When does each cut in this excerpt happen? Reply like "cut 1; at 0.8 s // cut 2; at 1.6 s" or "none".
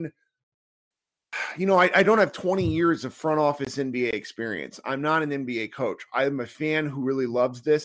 none